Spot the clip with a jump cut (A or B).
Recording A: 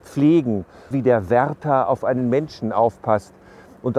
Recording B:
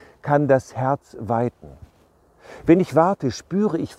A